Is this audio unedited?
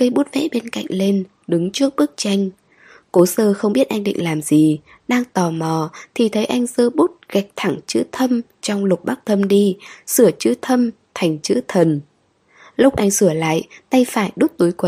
yes; 0 cuts

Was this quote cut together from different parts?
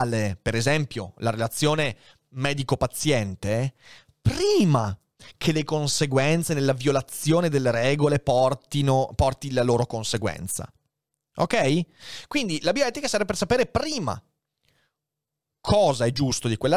no; 0 cuts

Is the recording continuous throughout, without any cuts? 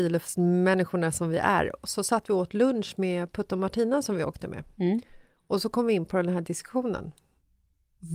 yes; 0 cuts

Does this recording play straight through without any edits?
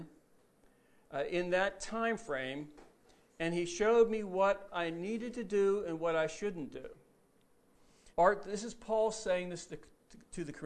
no; 1 cut; at 8.1 s

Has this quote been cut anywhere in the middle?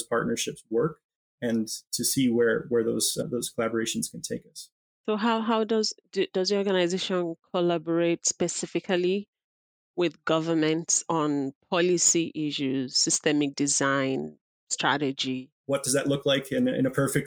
yes; 1 cut; at 15.6 s

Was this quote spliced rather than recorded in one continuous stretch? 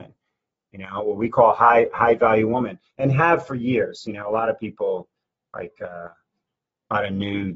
no; 0 cuts

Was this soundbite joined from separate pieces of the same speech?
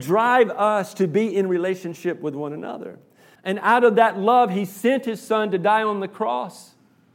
yes; 1 cut; at 3.4 s

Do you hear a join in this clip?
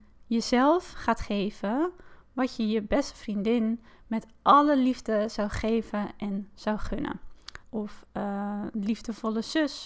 yes; 1 cut; at 7.6 s

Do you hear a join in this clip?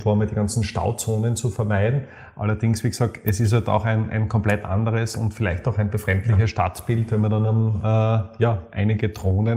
yes; 1 cut; at 7.8 s

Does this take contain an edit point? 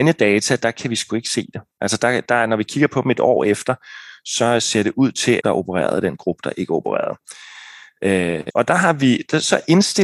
yes; 2 cuts; at 5.4 s, 8.5 s

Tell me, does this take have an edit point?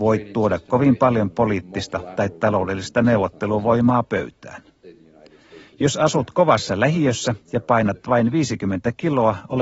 no; 0 cuts

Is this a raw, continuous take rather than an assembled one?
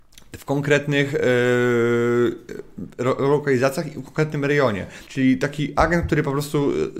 no; 1 cut; at 5.1 s

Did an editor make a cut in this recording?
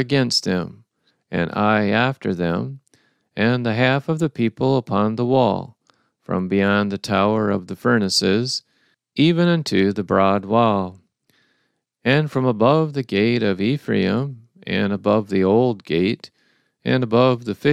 no; 0 cuts

